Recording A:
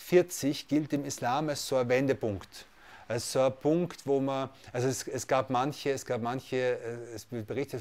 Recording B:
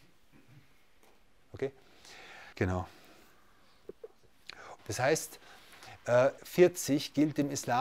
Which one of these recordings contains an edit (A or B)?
B